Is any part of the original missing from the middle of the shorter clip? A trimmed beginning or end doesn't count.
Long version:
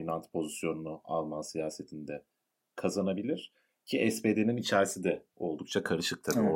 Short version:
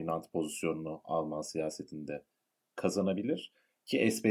no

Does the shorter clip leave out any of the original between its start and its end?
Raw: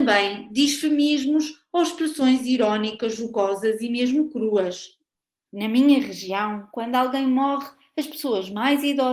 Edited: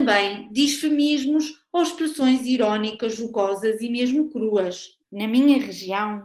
yes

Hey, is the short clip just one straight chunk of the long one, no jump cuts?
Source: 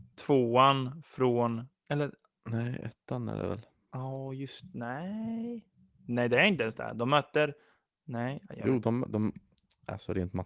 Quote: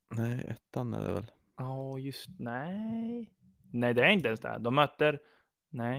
yes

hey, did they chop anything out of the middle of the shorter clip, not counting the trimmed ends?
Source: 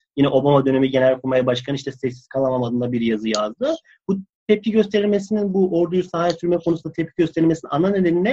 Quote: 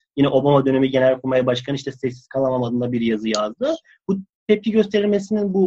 no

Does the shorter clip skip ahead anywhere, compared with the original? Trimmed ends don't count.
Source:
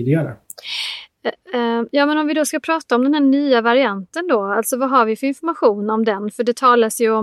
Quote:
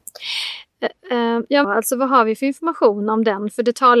yes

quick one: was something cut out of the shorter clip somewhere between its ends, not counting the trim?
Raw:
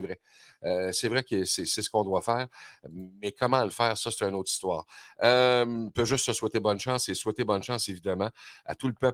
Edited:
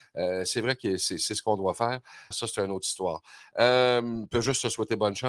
yes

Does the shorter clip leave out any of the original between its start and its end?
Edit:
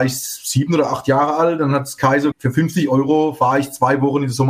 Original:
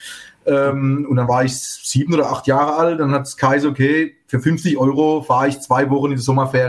yes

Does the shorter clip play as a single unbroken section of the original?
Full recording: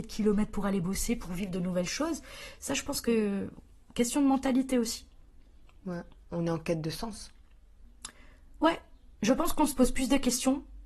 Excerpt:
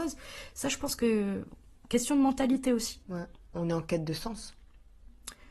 no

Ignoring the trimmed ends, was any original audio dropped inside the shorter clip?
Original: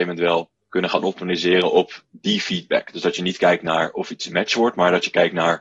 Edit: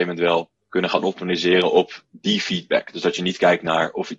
no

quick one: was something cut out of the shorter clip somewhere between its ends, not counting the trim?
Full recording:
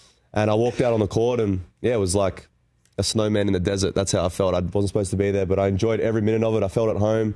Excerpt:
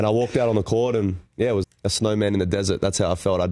yes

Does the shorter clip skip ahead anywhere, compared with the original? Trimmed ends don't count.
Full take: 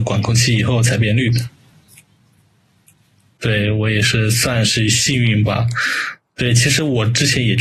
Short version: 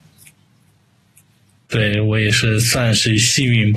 no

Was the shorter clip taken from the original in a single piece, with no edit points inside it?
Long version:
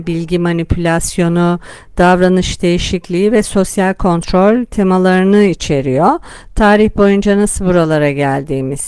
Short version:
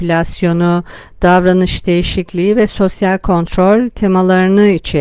yes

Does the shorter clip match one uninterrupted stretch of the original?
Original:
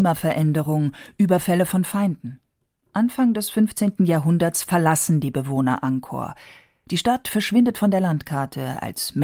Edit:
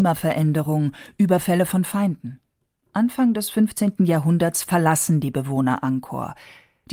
yes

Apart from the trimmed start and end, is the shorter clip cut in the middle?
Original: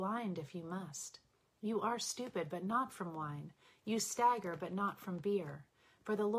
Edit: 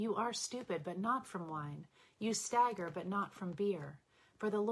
no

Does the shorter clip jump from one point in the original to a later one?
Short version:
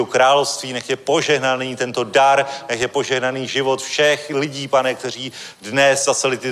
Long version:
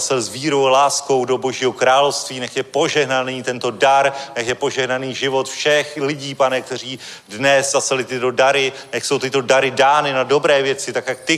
no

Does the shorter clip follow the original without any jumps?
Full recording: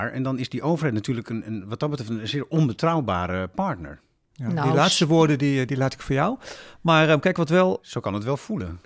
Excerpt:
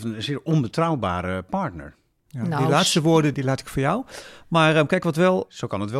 no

